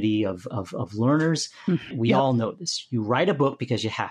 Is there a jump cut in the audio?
yes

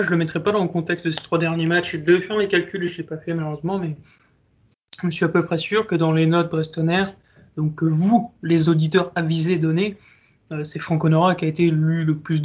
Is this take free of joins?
yes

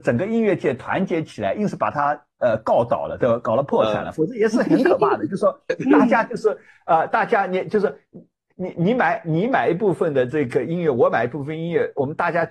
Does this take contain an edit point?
no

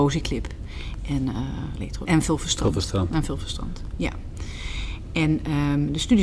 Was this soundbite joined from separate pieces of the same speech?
yes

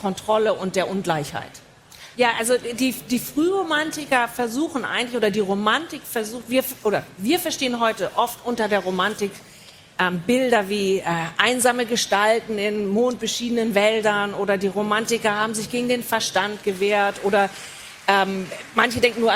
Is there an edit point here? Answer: yes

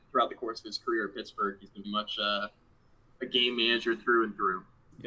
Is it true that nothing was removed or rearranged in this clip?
no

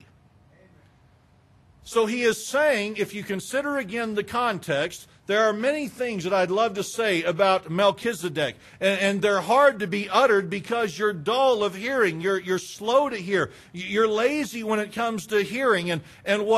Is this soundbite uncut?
yes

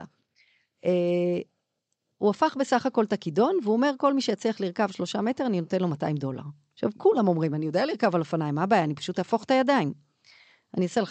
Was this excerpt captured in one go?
yes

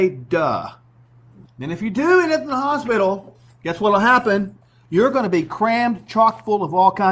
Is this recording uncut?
no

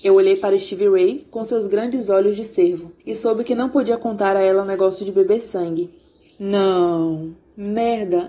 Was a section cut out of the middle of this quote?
yes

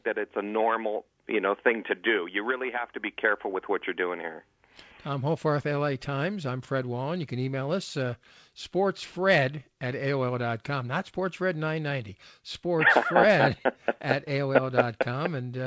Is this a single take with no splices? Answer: yes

